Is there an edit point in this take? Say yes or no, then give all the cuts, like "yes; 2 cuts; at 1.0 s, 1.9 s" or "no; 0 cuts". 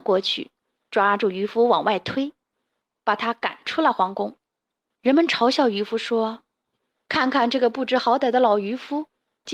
yes; 1 cut; at 4.9 s